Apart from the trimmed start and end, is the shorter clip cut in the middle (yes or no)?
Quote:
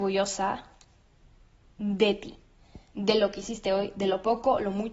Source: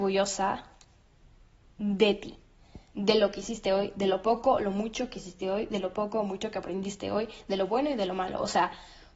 no